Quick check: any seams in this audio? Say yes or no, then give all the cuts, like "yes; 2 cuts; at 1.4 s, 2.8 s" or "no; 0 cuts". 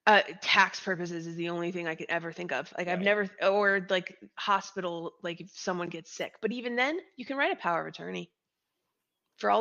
no; 0 cuts